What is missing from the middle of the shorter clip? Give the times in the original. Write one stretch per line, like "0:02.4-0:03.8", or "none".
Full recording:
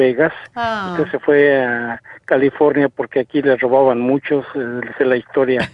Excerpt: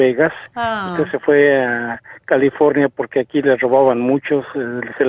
none